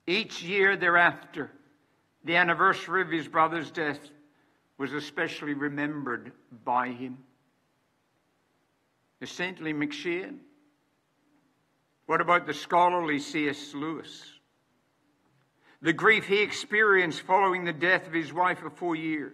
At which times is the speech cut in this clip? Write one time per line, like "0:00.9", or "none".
none